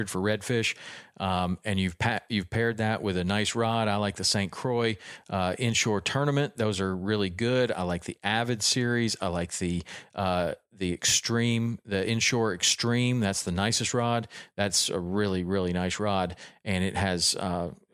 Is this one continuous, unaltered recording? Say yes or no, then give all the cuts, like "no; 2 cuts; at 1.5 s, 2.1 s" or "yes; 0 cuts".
yes; 0 cuts